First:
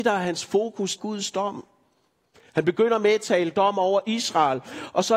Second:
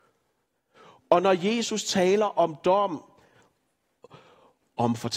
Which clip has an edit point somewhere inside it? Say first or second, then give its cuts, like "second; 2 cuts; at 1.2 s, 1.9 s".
first; 1 cut; at 1.0 s